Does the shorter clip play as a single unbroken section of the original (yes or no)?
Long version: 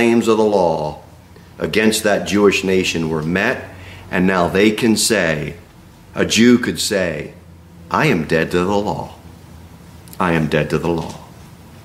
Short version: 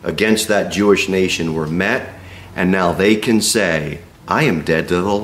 no